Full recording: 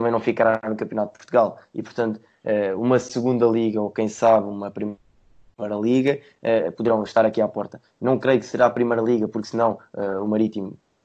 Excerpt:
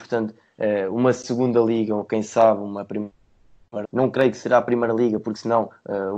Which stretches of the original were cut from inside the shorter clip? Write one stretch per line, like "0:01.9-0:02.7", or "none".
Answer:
0:05.7-0:07.9